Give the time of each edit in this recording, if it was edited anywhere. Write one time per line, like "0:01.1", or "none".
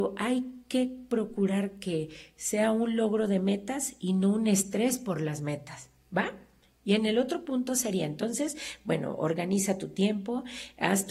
none